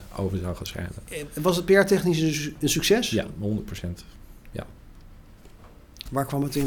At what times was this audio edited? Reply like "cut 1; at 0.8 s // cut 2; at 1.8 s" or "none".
none